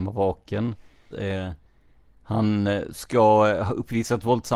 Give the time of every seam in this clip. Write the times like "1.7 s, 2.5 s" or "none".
1.1 s